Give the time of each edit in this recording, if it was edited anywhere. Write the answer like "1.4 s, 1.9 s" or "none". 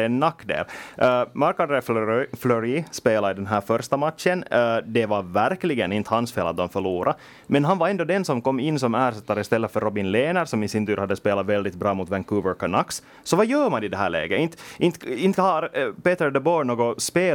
none

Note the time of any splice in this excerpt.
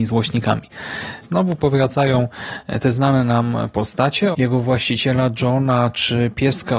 1.2 s, 4.3 s

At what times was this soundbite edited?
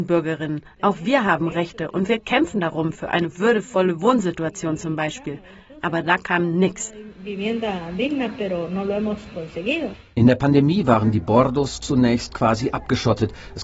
none

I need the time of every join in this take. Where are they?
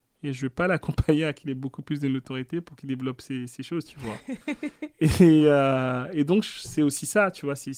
none

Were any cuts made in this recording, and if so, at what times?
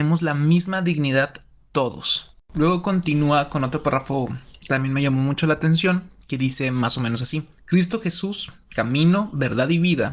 none

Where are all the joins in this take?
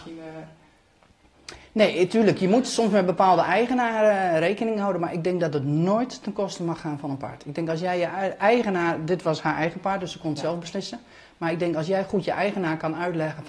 none

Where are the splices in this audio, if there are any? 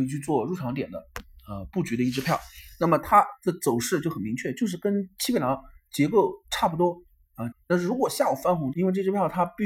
7.5 s, 8.7 s

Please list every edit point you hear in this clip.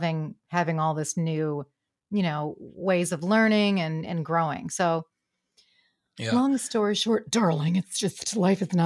none

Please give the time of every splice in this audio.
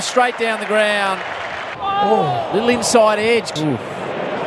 1.7 s, 3.6 s

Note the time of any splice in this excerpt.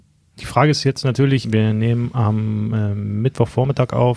1.4 s

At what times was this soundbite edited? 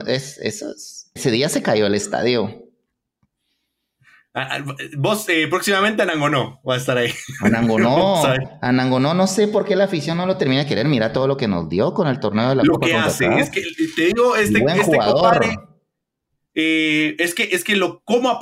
1.2 s

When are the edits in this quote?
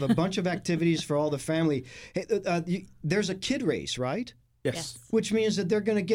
none

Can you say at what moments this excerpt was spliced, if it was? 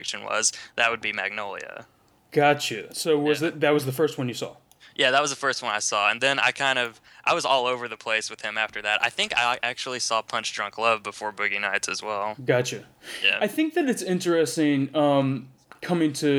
none

